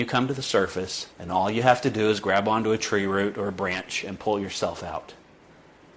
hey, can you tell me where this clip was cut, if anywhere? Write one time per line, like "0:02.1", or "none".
0:01.1